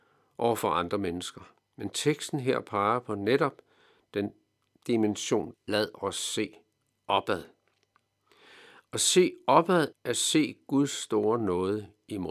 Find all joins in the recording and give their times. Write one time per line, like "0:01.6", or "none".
0:05.5
0:09.9